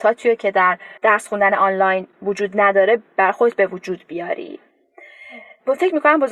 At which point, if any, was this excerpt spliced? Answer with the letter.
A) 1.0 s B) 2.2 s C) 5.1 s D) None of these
A